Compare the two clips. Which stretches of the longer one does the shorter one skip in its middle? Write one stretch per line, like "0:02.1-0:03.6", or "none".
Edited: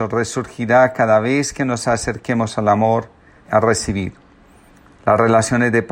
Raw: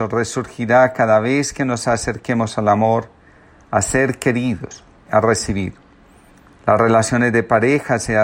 0:03.4-0:05.0